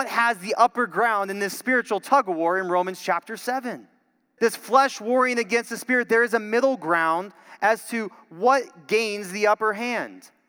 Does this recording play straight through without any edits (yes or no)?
no